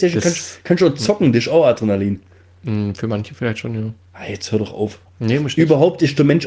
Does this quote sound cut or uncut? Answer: cut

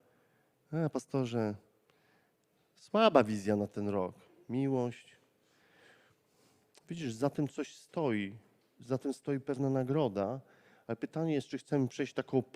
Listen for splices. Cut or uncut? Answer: uncut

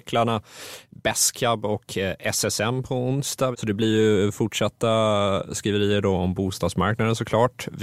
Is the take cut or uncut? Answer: cut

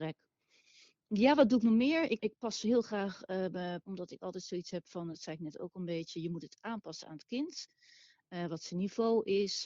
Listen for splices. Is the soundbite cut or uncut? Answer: cut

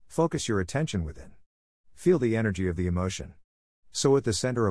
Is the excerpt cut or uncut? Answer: cut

